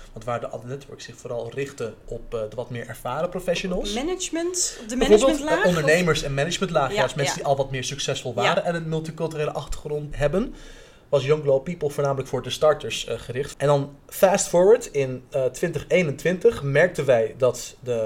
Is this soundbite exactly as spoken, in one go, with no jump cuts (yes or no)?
no